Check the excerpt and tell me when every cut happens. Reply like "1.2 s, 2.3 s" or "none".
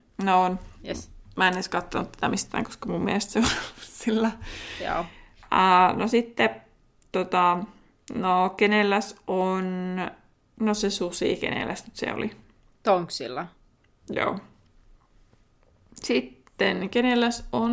none